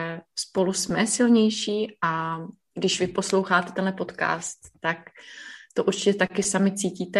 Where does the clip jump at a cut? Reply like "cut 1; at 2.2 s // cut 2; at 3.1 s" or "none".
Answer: none